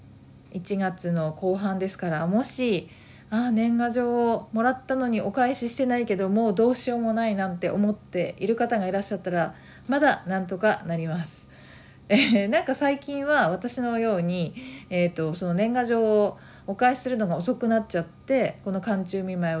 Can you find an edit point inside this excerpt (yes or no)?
no